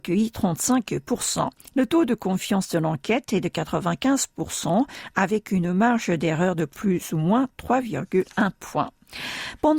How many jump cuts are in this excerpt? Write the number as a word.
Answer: one